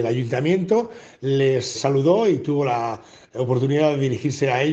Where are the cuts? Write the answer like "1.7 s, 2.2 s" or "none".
1.7 s